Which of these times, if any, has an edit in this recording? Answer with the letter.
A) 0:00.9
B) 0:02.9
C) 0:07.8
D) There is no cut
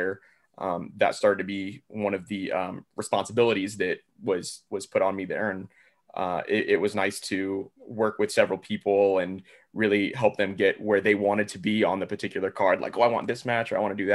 C